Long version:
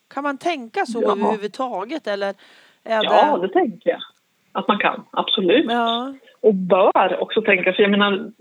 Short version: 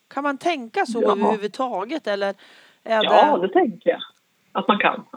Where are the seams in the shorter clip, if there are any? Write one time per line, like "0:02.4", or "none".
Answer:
none